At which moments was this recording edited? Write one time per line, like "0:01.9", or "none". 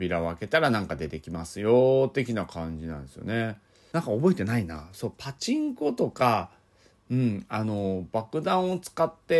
0:03.9